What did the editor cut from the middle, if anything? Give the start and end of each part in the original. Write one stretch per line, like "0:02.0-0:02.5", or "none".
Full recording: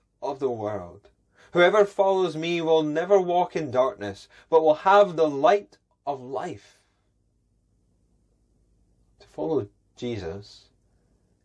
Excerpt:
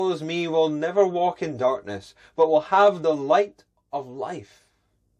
none

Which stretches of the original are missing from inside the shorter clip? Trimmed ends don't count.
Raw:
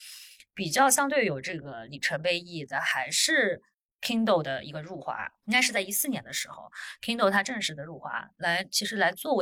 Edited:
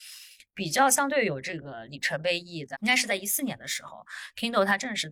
0:02.7-0:05.4

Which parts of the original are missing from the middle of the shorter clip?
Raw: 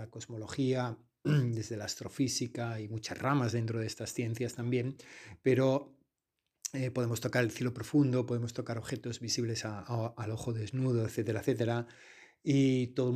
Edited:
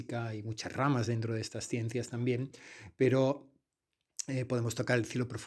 none

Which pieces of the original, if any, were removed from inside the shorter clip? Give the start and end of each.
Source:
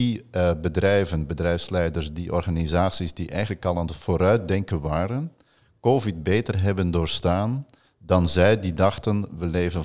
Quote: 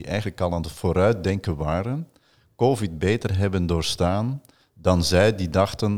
none

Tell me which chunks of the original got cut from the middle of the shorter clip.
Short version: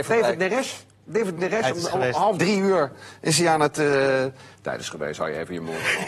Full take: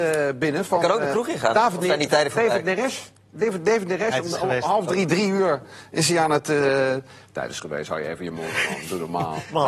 0:03.6-0:03.8
0:04.9-0:05.1

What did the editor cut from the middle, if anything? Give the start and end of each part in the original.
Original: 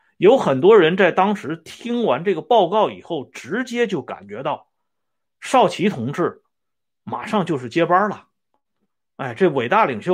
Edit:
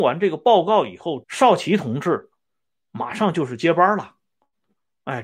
0:03.3-0:05.3

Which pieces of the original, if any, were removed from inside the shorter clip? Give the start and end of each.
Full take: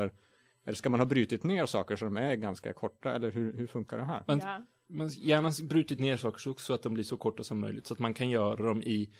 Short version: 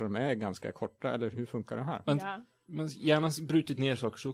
0:03.3-0:03.5

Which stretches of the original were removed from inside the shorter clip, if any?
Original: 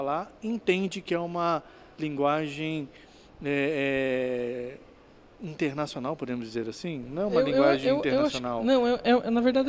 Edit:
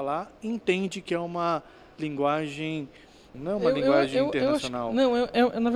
0:03.3-0:07.0

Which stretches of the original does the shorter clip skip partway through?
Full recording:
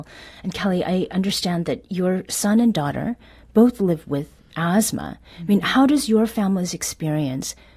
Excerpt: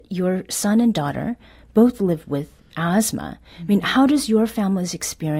none

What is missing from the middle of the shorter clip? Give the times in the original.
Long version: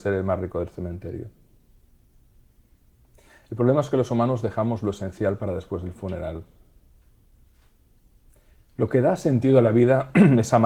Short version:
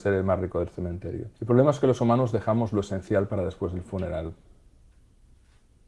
0:01.3-0:03.4

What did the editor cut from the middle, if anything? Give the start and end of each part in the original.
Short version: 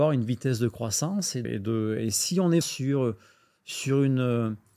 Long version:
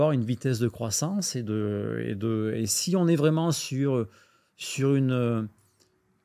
0:01.4-0:02.0
0:03.2-0:03.5

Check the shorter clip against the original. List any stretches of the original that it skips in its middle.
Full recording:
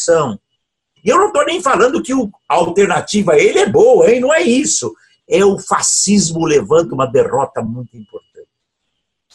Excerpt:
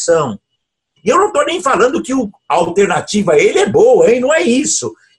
none

